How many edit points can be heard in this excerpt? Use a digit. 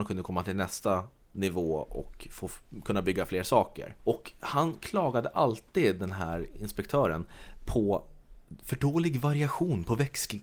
1